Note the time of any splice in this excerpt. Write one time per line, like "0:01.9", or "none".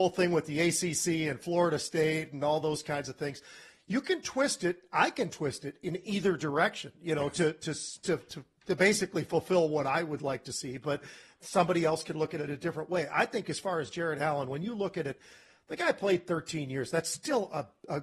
none